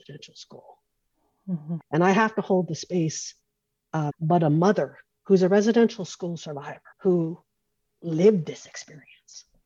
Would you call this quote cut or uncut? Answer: cut